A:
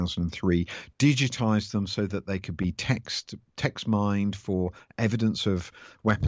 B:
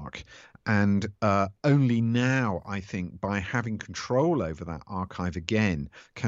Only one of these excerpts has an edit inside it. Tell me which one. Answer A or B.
A